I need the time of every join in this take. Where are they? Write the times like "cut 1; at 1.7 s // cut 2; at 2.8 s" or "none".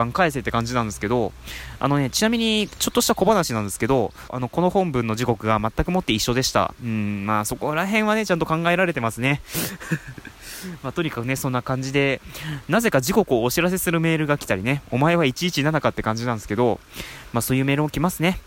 cut 1; at 4.3 s